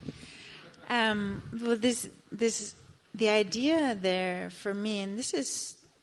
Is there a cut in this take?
no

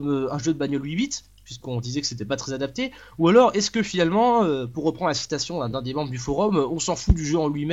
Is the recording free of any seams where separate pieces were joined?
yes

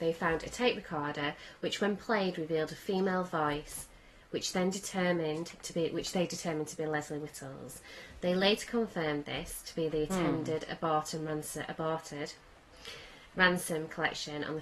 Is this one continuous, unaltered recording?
yes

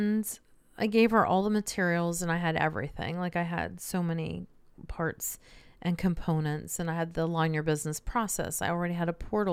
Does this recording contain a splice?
no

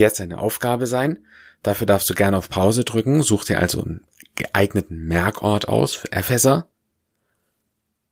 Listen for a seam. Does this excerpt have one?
no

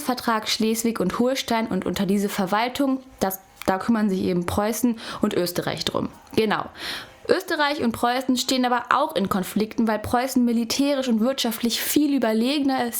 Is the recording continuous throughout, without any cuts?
yes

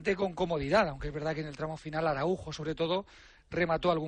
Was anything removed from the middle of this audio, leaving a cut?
no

